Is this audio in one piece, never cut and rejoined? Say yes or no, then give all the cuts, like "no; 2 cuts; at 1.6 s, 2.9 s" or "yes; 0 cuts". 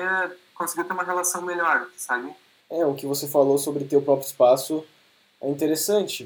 no; 1 cut; at 2.6 s